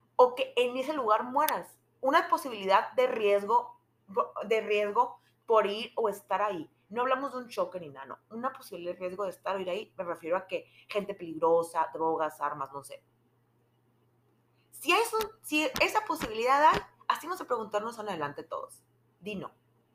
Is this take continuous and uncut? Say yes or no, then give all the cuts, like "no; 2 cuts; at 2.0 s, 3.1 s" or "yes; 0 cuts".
yes; 0 cuts